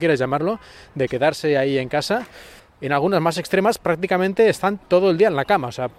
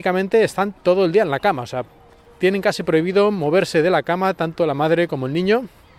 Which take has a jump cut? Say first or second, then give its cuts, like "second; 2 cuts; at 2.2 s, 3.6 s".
first; 1 cut; at 2.6 s